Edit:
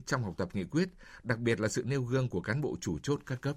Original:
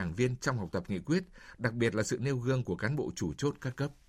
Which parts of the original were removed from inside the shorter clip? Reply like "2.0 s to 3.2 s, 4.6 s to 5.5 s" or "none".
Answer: none